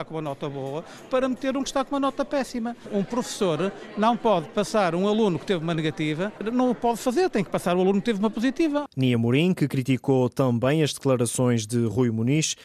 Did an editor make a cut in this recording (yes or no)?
no